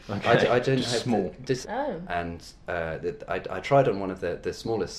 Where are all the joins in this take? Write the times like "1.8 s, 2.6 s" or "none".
1.6 s